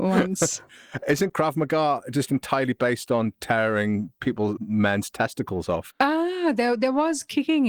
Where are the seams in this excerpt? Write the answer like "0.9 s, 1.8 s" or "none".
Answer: 4.6 s, 5.9 s